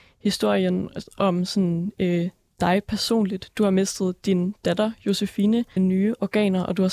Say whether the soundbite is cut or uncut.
cut